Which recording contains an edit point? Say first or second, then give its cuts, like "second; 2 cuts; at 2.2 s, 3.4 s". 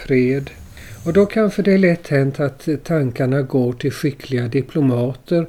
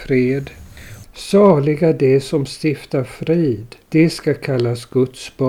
second; 2 cuts; at 1.0 s, 3.8 s